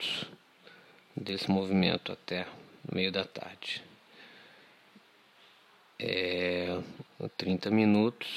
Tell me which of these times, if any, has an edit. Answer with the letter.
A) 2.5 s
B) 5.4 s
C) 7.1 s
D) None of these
C